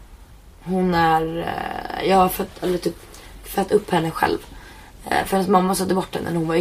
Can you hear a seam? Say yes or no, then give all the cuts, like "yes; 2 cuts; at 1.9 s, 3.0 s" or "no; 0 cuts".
no; 0 cuts